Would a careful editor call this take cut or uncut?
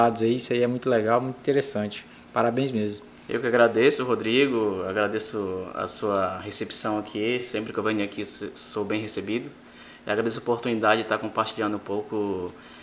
uncut